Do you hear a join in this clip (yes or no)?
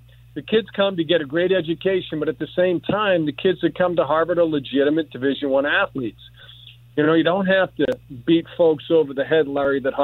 no